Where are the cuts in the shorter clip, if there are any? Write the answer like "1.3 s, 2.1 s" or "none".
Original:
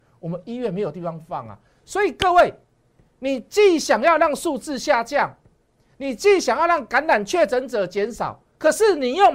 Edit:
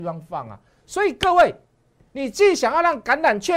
2.1 s